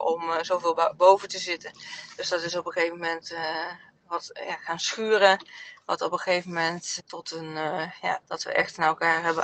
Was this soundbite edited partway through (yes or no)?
yes